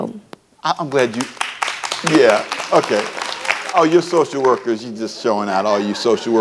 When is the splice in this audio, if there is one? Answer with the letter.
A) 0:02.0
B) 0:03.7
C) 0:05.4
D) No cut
B